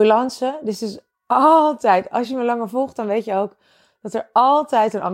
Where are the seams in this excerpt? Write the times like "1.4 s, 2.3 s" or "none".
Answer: none